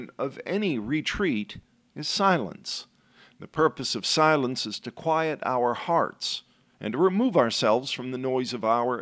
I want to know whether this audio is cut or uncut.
uncut